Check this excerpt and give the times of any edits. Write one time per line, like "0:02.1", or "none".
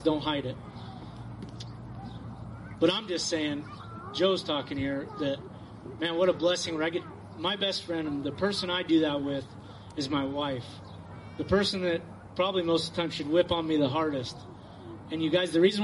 none